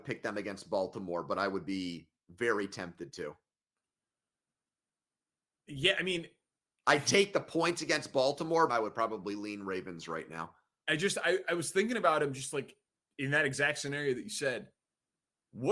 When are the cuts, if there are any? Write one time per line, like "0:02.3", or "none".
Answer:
0:08.7

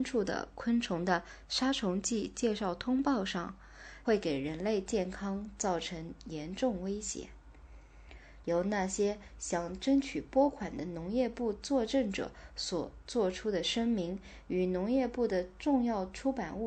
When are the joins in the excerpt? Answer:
0:04.0
0:08.4

